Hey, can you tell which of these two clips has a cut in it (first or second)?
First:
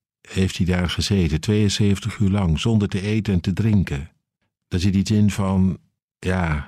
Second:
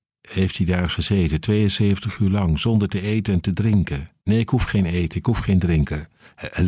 second